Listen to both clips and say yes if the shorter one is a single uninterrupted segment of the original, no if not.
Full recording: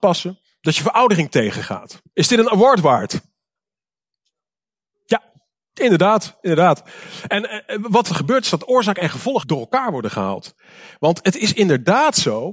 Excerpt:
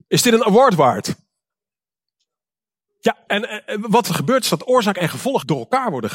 no